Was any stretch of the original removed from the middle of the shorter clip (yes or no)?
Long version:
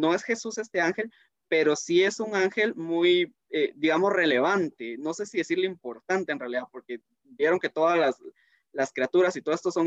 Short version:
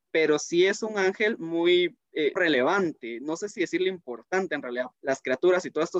yes